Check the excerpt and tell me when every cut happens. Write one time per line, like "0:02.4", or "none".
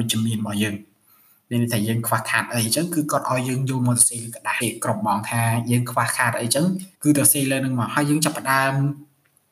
0:04.6
0:06.9